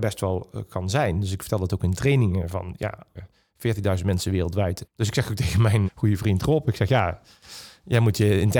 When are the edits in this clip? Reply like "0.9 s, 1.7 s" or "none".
3.1 s, 4.8 s, 5.9 s

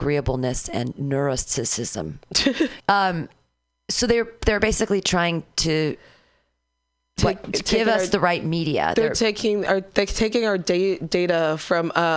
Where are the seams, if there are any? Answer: 2.8 s

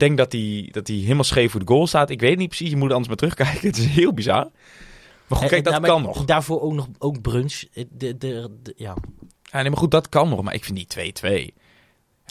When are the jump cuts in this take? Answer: 9.3 s

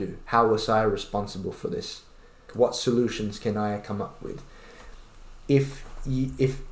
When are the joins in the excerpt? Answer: 2.5 s

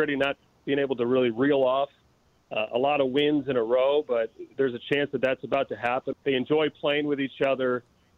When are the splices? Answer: 6.1 s

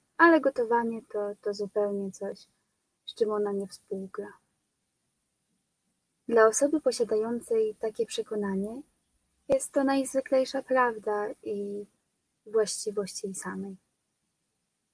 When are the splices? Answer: none

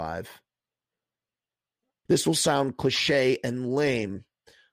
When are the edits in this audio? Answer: 2.1 s

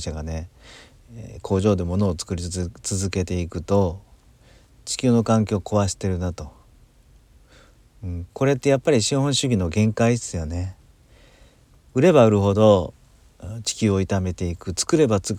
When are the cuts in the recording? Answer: none

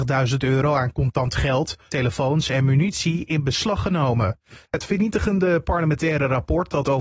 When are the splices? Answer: 1.9 s, 4.6 s

